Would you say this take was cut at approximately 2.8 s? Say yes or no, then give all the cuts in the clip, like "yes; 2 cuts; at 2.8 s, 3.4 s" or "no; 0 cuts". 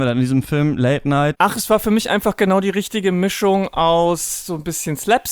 no; 1 cut; at 1.3 s